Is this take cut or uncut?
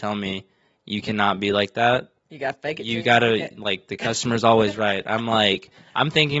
uncut